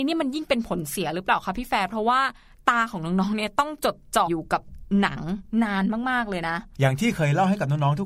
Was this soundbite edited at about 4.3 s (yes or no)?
yes